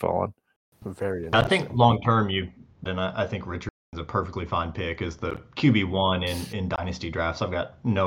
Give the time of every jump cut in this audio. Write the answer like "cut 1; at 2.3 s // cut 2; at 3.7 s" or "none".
cut 1; at 2.9 s